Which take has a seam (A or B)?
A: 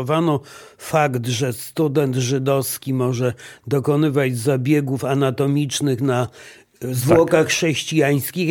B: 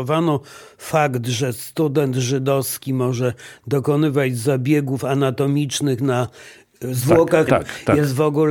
B